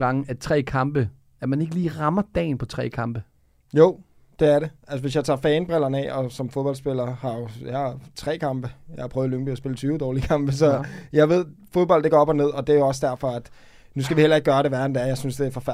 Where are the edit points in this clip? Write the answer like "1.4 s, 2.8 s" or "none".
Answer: none